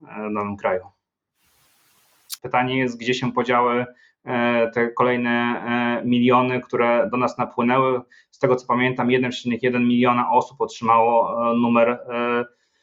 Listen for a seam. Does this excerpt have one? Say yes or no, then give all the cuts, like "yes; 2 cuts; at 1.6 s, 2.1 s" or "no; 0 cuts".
yes; 1 cut; at 2.4 s